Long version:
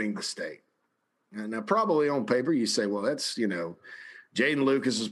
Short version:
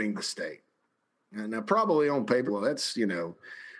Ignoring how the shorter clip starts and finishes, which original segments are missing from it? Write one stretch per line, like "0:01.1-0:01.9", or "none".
0:02.5-0:02.9